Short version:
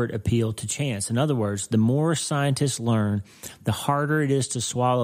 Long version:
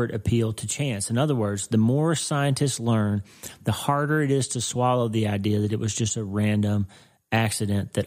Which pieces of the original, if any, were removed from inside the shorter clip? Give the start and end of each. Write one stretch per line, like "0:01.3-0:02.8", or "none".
none